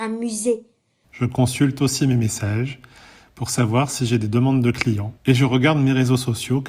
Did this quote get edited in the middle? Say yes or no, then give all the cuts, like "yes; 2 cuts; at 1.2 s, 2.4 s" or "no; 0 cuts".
yes; 2 cuts; at 1.0 s, 5.2 s